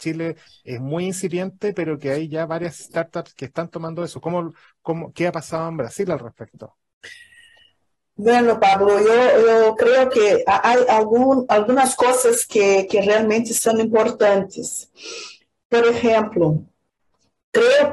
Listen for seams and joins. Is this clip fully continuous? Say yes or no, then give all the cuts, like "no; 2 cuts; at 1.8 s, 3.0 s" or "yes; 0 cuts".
yes; 0 cuts